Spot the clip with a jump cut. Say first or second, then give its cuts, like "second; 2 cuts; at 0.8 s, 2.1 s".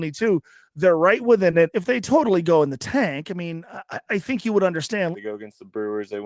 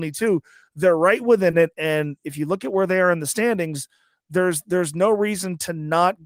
first; 2 cuts; at 1.7 s, 5.1 s